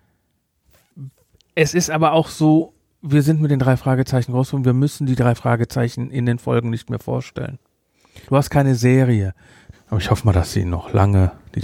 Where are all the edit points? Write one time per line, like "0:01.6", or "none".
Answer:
0:08.2
0:09.7